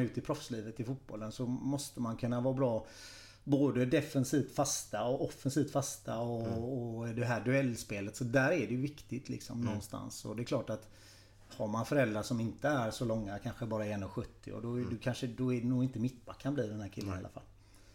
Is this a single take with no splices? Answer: yes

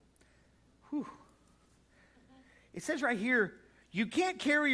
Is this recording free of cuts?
yes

